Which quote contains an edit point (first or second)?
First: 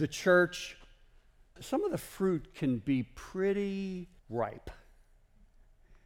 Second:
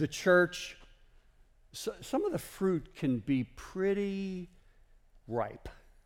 first